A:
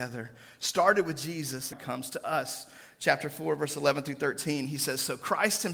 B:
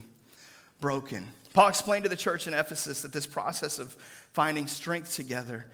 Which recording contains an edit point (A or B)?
A